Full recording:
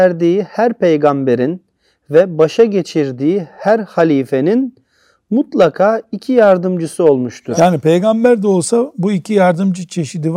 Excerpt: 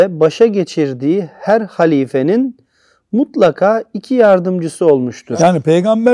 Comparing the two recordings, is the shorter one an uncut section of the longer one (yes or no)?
yes